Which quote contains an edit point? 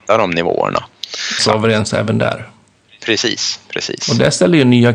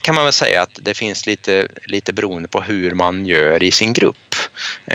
first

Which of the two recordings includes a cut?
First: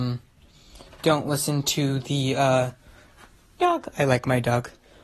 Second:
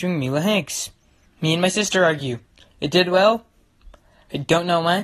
first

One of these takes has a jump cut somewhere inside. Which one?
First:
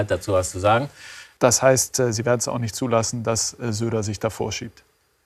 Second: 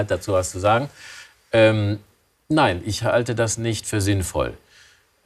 first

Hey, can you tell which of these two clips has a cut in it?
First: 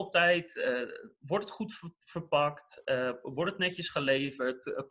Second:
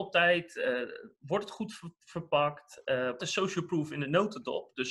second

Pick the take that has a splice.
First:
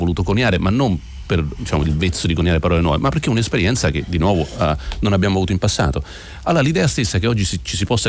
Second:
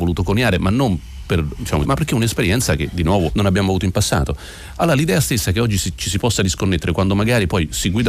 second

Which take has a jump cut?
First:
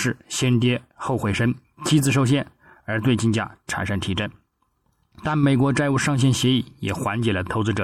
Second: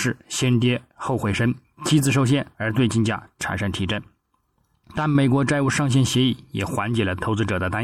second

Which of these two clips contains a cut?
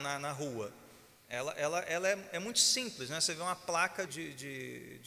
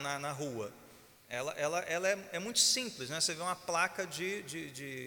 first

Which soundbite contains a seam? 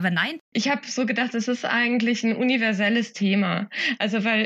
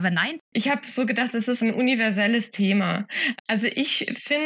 second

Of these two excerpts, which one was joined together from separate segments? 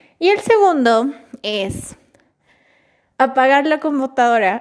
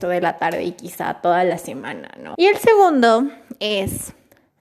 second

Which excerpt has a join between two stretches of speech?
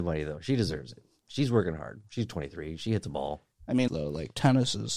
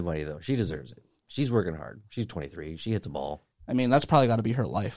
first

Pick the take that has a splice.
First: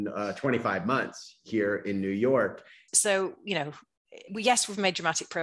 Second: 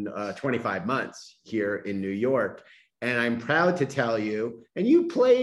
first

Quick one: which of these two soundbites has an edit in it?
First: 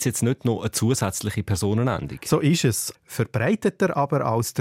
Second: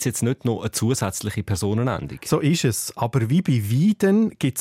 first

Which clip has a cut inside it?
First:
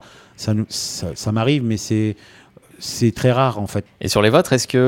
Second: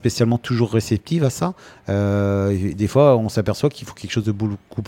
first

